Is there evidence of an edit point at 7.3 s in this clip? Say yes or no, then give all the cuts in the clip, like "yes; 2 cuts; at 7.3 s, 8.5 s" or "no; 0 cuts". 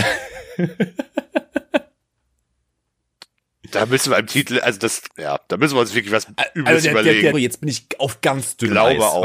yes; 2 cuts; at 5.1 s, 7.3 s